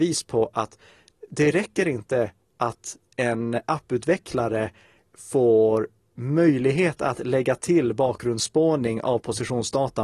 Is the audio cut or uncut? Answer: cut